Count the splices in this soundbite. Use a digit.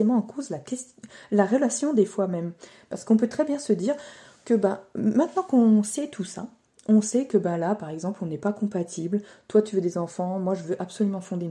0